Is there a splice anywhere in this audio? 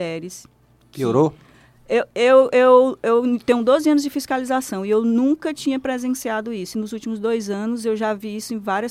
no; 0 cuts

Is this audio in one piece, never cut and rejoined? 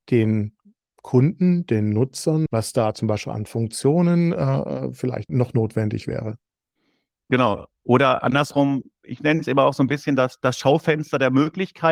no; 2 cuts; at 2.5 s, 5.3 s

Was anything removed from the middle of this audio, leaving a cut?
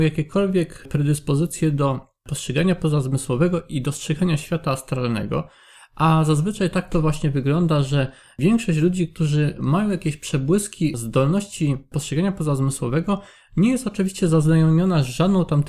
no; 0 cuts

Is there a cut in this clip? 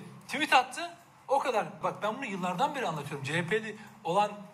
yes; 1 cut; at 1.8 s

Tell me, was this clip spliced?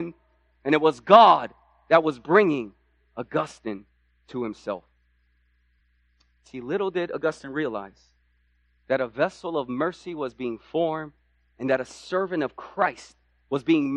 no; 0 cuts

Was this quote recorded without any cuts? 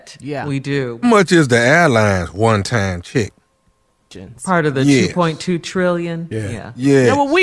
no; 1 cut; at 1.0 s

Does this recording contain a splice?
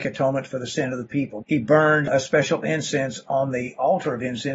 yes; 1 cut; at 1.4 s

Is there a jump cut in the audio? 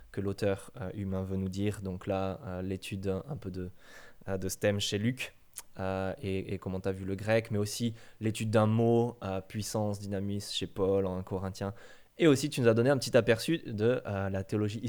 no; 0 cuts

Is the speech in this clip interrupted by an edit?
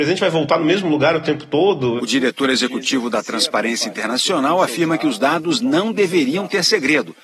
yes; 1 cut; at 2.0 s

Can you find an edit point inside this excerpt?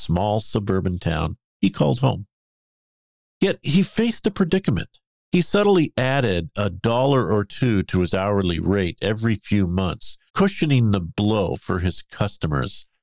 yes; 2 cuts; at 5.2 s, 10.3 s

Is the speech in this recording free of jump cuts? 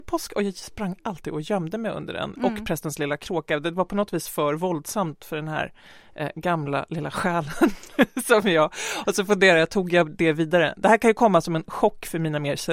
yes; 0 cuts

